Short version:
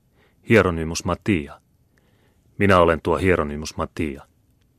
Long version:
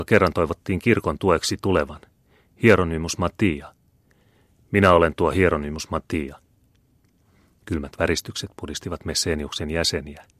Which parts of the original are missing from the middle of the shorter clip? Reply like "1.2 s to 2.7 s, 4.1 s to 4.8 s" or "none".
none